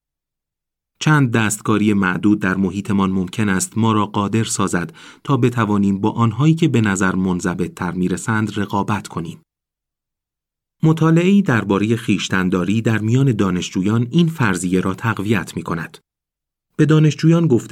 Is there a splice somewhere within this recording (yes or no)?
no